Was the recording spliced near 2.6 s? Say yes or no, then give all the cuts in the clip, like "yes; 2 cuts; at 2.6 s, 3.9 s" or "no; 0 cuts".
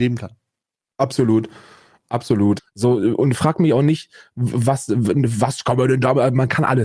yes; 1 cut; at 2.6 s